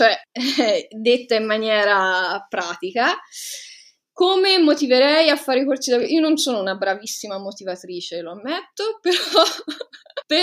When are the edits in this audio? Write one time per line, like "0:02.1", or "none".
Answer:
none